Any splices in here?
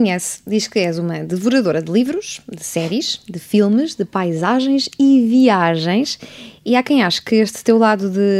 no; 0 cuts

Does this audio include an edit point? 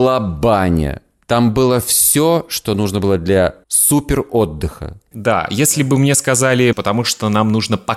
yes; 3 cuts; at 3.6 s, 5.1 s, 6.7 s

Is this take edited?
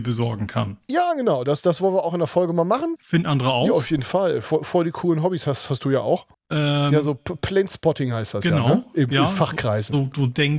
yes; 2 cuts; at 3.0 s, 6.3 s

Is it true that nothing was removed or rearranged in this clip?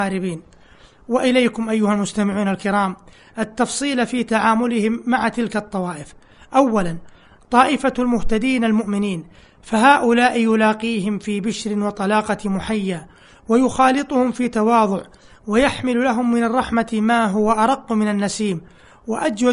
yes; 0 cuts

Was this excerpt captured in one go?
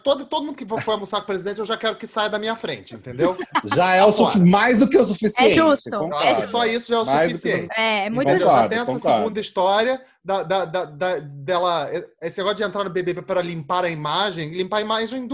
no; 1 cut; at 7.7 s

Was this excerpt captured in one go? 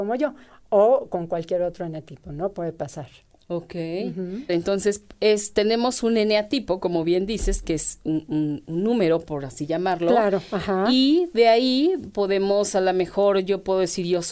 no; 1 cut; at 4.5 s

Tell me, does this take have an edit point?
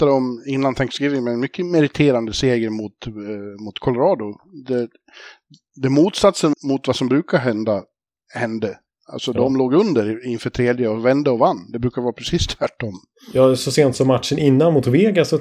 yes; 1 cut; at 6.5 s

